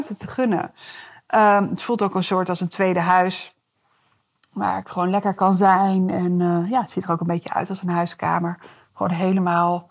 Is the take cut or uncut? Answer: uncut